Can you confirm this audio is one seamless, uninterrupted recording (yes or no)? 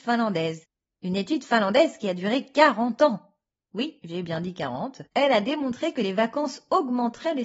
no